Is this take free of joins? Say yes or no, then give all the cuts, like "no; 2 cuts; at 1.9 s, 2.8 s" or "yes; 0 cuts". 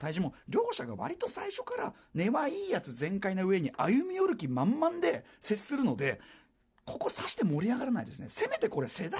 yes; 0 cuts